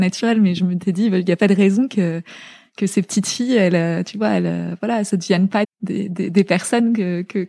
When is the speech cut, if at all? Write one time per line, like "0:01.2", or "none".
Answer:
0:05.6